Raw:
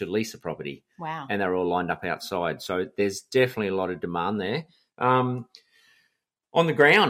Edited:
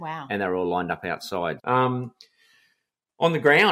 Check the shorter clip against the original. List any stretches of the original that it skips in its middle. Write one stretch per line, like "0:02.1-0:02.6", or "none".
0:02.6-0:04.9

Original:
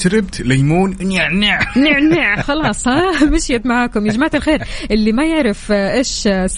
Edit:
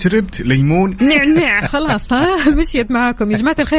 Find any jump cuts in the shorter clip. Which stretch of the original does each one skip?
0:01.0-0:01.7

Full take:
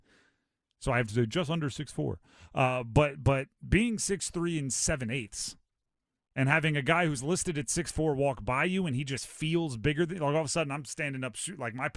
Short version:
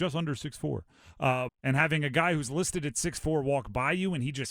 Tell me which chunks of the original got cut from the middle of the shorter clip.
0:02.8-0:06.2

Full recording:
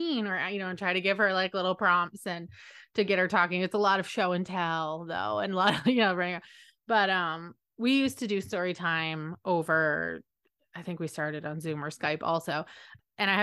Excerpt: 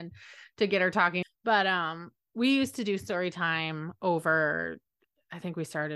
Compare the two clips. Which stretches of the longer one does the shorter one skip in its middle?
0:03.6-0:06.7

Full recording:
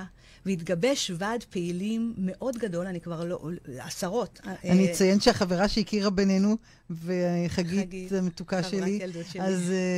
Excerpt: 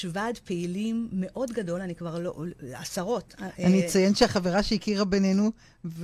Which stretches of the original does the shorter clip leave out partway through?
none

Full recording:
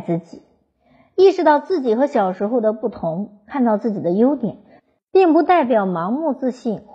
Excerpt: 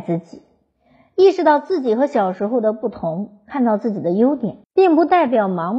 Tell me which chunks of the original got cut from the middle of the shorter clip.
0:04.6-0:05.0

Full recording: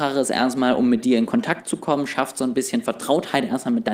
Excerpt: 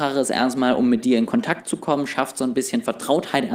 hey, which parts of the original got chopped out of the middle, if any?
none

